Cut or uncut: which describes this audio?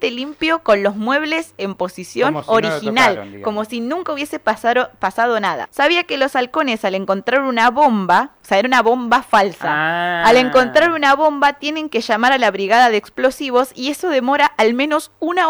cut